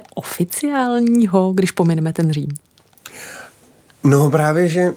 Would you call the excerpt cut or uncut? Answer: uncut